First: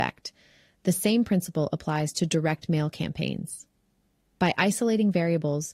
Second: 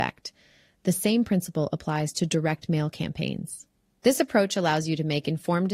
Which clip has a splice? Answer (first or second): second